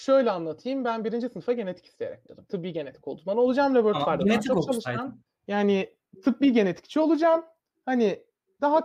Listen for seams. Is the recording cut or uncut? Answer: uncut